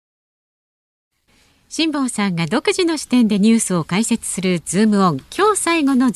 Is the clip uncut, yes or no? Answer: yes